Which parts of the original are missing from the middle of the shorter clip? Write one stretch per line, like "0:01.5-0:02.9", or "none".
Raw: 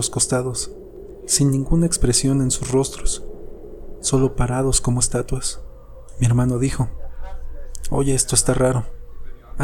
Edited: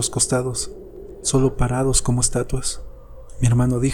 0:01.2-0:04.0